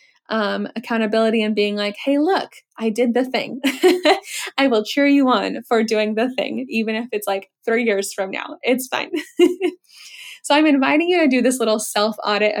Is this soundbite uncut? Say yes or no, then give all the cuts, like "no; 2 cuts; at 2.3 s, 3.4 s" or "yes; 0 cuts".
yes; 0 cuts